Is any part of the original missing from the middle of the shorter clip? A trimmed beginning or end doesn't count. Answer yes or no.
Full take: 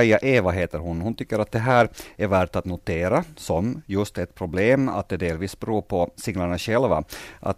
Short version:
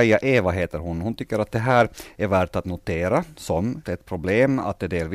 yes